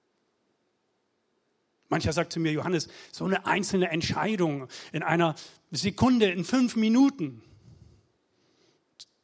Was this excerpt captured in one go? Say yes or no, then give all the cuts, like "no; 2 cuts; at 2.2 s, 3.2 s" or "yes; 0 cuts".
yes; 0 cuts